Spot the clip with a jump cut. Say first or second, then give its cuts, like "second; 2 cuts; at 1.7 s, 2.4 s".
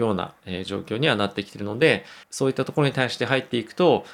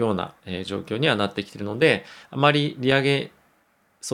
first; 1 cut; at 2.2 s